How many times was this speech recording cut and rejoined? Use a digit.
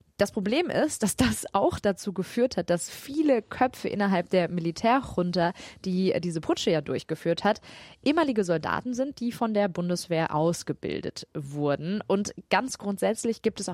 0